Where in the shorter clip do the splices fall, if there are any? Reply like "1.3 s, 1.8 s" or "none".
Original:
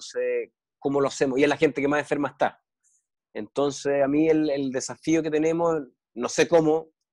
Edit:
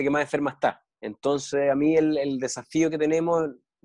0.9 s